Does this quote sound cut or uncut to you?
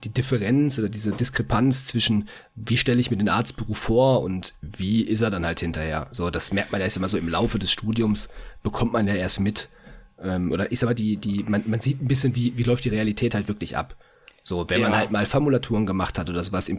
uncut